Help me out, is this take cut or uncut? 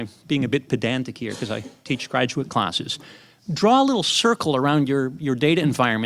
uncut